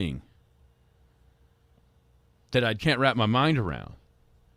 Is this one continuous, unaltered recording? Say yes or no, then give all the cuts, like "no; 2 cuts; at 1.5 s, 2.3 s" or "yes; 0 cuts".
no; 1 cut; at 2.8 s